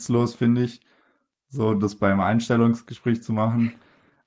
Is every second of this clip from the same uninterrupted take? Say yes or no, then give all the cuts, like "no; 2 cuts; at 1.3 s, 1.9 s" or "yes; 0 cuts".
yes; 0 cuts